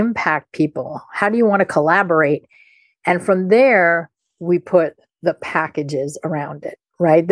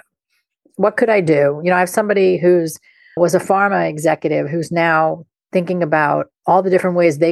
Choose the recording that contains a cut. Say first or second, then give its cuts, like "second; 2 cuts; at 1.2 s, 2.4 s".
second; 1 cut; at 3.2 s